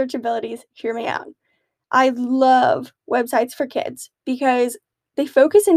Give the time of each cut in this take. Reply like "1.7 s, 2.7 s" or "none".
none